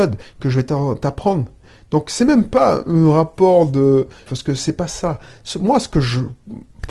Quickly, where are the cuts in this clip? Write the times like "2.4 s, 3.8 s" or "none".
4.3 s